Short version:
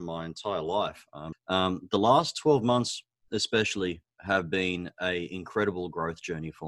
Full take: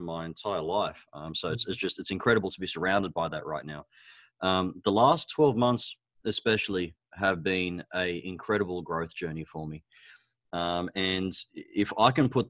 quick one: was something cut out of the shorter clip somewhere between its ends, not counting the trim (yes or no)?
yes